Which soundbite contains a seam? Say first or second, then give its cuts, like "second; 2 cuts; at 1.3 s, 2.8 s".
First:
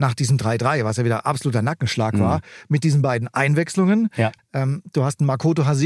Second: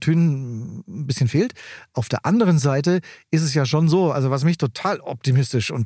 first; 1 cut; at 4.4 s